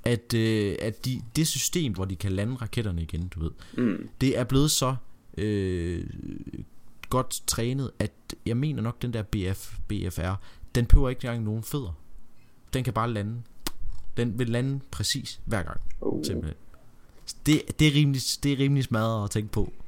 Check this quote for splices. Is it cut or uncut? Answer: cut